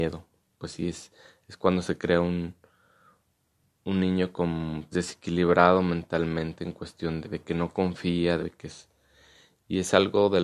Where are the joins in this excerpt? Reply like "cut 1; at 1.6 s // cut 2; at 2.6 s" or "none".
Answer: cut 1; at 4.9 s // cut 2; at 7.2 s // cut 3; at 8.4 s